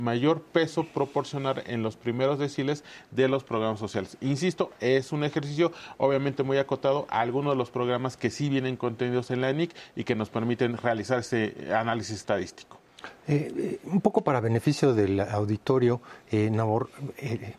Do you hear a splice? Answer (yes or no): no